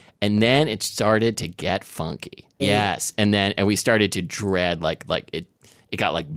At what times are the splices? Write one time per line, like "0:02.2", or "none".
0:02.6

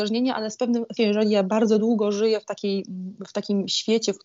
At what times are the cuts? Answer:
0:01.0

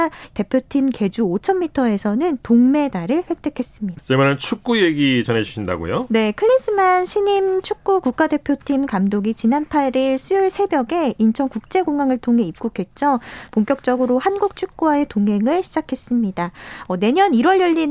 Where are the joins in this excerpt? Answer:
0:04.0

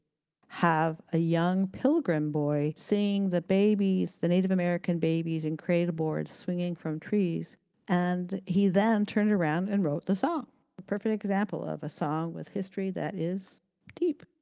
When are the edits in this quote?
none

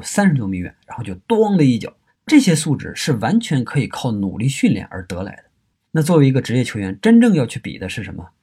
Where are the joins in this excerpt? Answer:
0:02.1
0:05.8

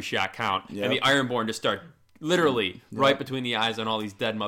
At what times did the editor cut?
none

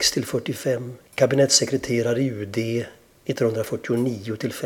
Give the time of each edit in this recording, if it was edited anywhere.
0:01.1

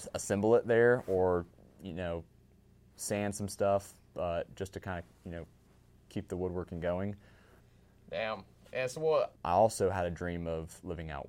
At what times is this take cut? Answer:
0:09.4

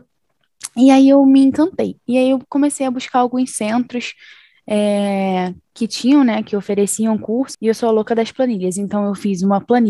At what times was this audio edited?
0:07.5

